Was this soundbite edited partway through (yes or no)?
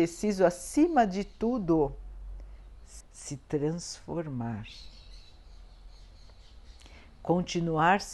yes